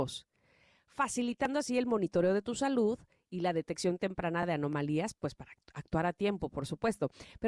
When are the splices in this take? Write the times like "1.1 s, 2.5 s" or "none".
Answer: none